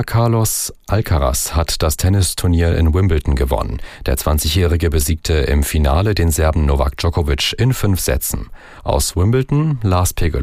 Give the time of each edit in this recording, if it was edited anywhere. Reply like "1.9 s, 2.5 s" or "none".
none

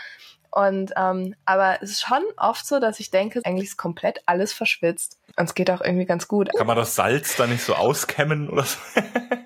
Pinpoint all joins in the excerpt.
3.4 s, 5.3 s, 6.5 s

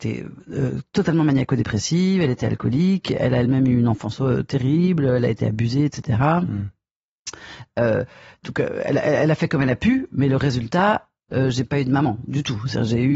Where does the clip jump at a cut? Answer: 11.3 s

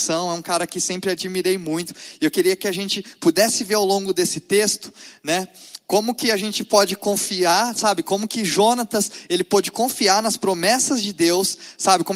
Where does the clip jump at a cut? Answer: none

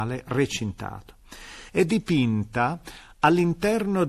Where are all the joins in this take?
1.7 s

